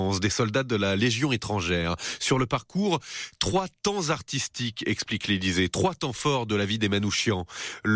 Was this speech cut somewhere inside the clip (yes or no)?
no